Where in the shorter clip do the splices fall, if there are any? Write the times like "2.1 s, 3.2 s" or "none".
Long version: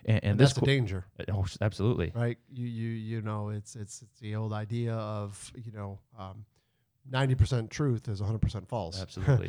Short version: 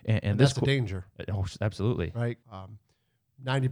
2.4 s